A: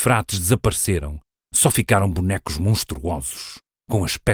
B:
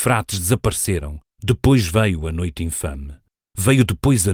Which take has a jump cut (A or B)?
B